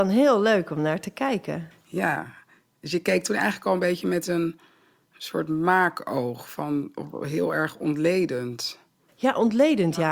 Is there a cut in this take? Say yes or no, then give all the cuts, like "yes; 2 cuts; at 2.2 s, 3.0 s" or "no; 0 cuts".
no; 0 cuts